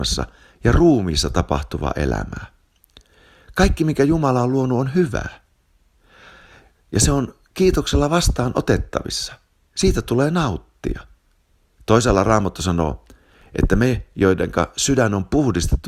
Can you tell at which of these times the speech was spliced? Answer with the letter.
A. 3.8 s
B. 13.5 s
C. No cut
C